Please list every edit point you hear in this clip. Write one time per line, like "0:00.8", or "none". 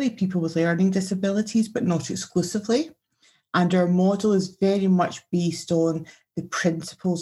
none